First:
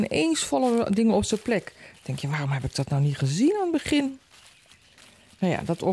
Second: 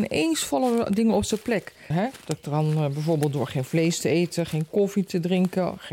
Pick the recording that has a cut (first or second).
second